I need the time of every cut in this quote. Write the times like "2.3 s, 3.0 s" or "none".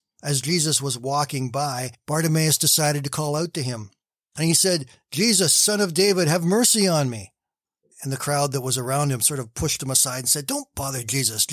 none